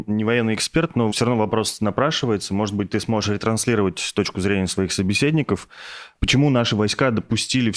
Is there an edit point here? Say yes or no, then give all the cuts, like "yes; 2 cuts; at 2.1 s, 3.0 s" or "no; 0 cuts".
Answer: no; 0 cuts